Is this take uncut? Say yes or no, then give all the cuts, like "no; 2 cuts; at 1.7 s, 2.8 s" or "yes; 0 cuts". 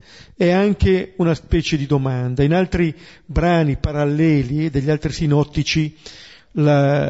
yes; 0 cuts